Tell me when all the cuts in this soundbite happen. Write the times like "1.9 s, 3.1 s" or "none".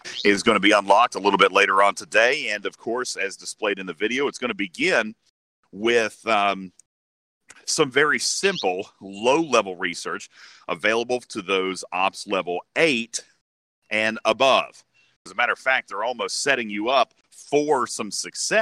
15.3 s, 17.2 s